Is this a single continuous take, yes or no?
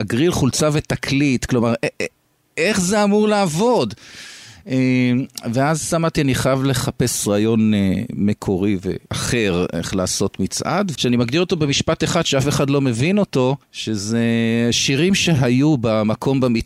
no